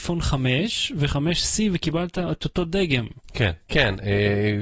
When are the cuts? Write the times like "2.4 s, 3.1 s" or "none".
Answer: 3.7 s